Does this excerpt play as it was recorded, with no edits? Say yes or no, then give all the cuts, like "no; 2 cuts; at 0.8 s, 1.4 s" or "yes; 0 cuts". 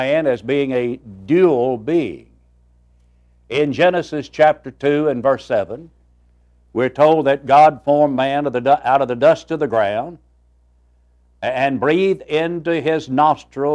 yes; 0 cuts